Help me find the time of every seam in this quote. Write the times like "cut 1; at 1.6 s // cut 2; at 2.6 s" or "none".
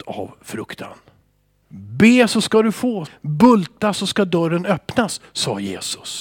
cut 1; at 1.6 s // cut 2; at 3.1 s

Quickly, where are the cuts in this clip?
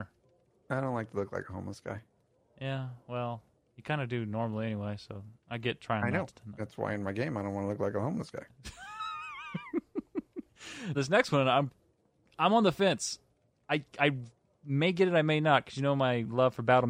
cut 1; at 10.9 s

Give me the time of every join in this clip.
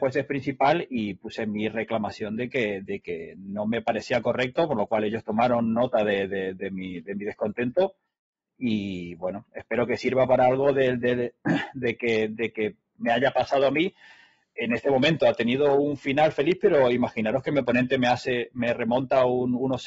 none

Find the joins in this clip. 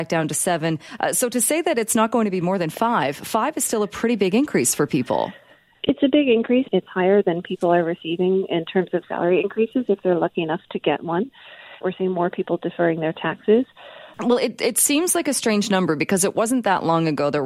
cut 1; at 6.7 s // cut 2; at 11.8 s // cut 3; at 14.1 s

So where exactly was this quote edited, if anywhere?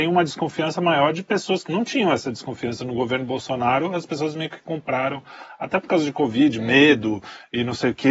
cut 1; at 1.7 s

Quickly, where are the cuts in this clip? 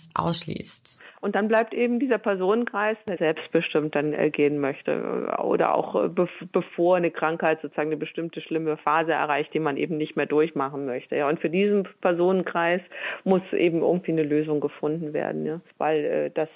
cut 1; at 3.2 s

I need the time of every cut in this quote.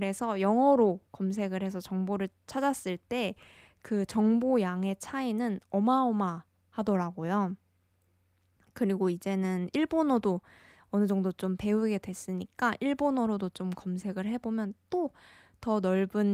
none

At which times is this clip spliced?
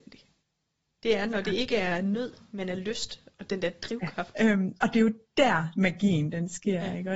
cut 1; at 4.3 s

